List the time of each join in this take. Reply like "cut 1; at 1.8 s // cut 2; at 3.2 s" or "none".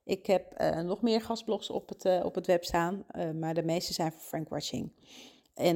none